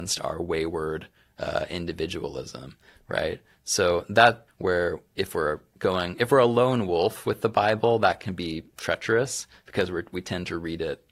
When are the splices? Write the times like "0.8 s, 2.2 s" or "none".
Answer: 4.5 s